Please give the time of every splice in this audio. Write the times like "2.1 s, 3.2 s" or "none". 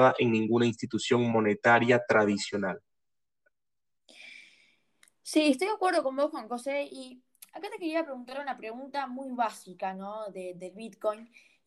none